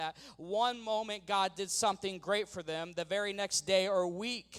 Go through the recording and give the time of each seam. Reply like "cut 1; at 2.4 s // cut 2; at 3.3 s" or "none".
none